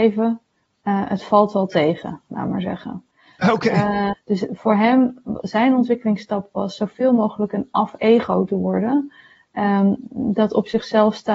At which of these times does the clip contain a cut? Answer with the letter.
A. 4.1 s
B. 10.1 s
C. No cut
A